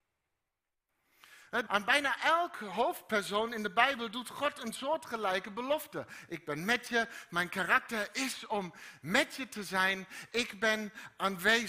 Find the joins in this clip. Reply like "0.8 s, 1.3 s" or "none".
1.7 s